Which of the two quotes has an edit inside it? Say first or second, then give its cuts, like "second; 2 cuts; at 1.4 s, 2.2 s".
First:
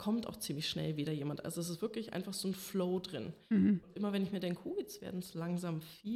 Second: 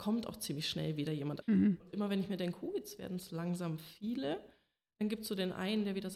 second; 1 cut; at 1.4 s